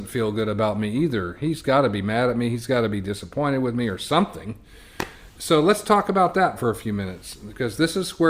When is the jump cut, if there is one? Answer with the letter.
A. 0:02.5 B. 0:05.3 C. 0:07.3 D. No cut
D